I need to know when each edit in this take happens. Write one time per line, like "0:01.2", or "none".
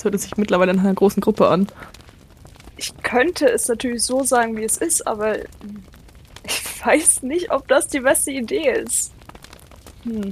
0:02.7